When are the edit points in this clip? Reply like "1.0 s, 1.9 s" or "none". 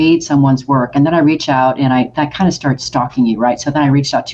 none